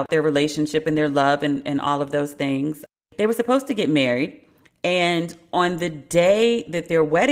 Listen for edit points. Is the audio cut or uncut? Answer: uncut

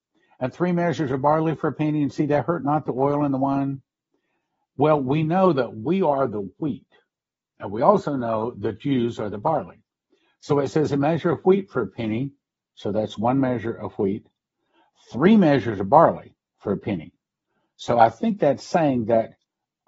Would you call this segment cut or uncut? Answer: uncut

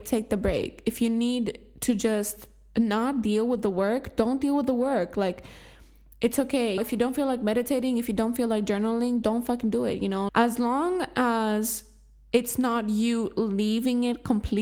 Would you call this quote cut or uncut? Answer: cut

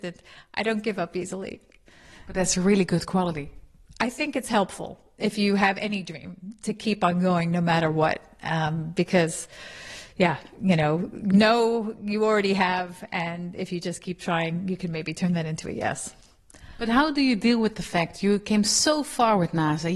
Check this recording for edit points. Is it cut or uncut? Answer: uncut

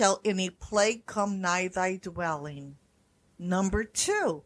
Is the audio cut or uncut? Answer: uncut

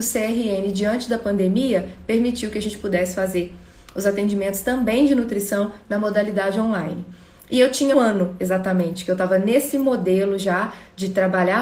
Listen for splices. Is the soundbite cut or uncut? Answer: cut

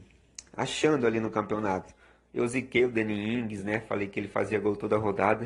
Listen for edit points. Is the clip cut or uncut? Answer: uncut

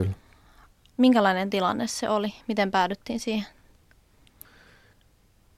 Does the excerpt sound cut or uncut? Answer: uncut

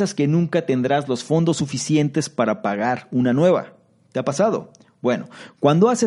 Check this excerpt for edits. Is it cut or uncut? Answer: uncut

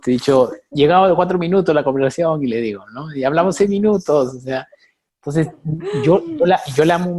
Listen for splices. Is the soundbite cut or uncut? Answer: uncut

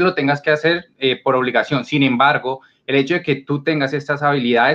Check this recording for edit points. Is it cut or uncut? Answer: uncut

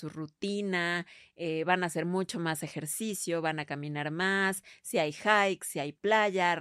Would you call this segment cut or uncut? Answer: uncut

